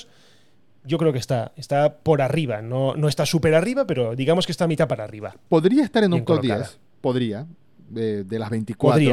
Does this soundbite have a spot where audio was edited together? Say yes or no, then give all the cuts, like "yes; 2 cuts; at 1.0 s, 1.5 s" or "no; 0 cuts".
no; 0 cuts